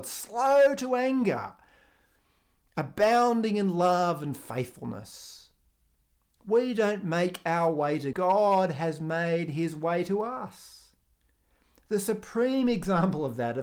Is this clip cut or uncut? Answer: cut